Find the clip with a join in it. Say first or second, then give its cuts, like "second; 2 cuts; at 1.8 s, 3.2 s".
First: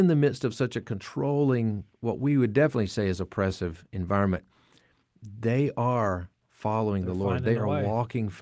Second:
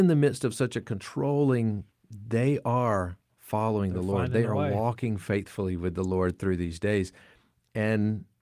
second; 1 cut; at 1.9 s